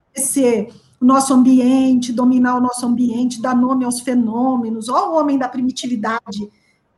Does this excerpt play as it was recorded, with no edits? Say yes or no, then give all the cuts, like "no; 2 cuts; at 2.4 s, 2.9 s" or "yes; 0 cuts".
yes; 0 cuts